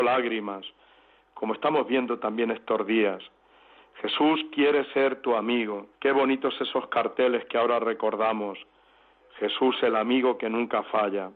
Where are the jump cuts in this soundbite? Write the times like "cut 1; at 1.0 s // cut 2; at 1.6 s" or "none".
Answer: cut 1; at 5.9 s